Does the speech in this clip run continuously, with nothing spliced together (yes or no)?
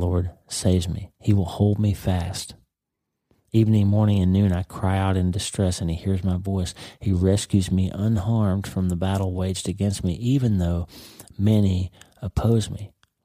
yes